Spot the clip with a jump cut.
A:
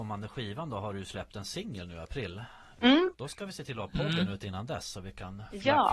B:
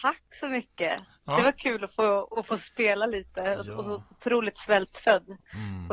A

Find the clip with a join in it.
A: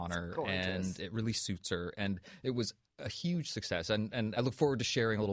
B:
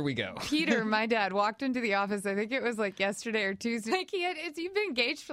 B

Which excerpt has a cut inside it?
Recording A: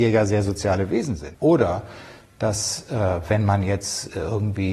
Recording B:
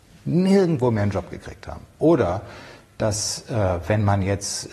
A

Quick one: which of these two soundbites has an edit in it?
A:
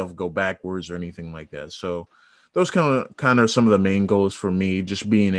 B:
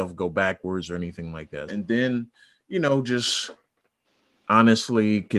B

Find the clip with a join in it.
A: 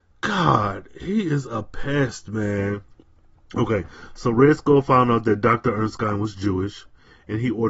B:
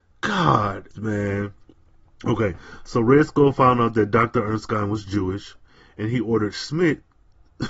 B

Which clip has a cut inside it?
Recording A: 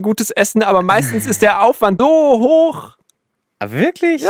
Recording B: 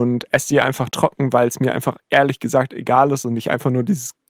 A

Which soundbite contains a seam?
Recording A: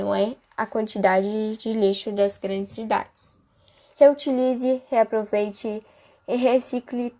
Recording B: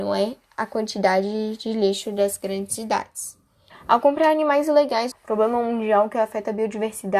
B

